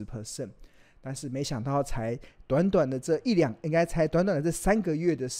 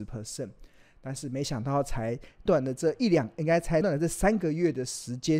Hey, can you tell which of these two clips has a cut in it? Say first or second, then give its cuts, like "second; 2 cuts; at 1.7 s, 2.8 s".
second; 2 cuts; at 2.5 s, 3.8 s